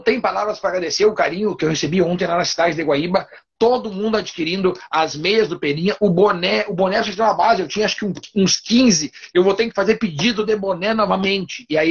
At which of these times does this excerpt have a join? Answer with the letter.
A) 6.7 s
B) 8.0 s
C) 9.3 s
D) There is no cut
C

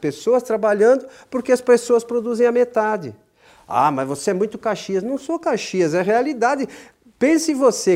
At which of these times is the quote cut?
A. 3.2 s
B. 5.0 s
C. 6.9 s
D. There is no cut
D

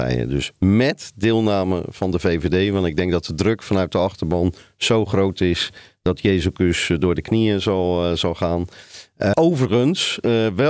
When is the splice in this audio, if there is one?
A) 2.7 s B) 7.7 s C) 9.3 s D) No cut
C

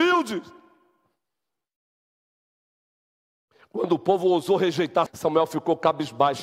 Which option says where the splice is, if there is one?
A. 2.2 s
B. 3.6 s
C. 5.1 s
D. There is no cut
C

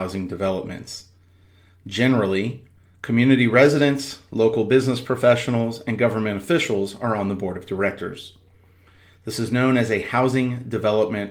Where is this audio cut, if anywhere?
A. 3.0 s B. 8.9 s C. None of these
C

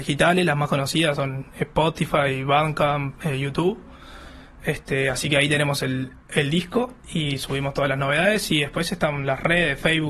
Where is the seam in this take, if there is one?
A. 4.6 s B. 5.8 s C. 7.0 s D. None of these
C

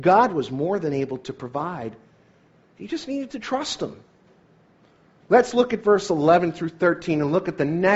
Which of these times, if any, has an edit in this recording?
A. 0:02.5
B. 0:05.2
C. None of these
B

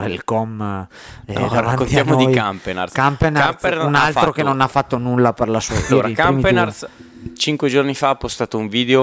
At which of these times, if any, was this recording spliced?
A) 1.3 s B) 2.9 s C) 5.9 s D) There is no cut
C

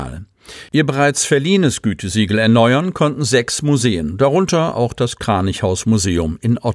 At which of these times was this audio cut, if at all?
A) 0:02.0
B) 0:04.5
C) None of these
C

